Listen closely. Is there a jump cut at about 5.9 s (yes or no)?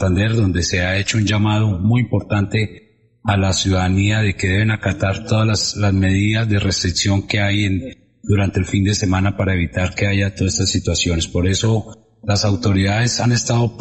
no